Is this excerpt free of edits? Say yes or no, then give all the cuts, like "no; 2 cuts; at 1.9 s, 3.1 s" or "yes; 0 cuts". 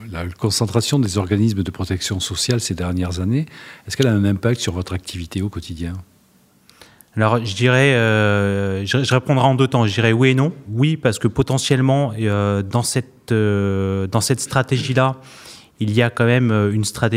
yes; 0 cuts